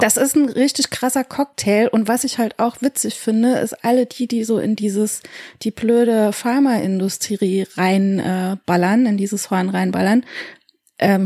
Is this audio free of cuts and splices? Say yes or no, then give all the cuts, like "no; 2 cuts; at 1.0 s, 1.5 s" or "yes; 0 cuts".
yes; 0 cuts